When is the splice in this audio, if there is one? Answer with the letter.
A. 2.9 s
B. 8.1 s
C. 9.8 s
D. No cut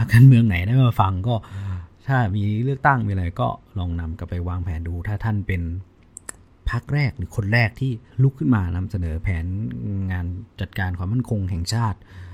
B